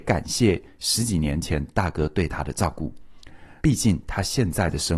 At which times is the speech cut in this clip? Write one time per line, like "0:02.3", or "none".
0:03.6